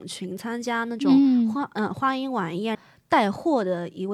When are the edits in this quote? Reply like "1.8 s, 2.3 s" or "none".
2.7 s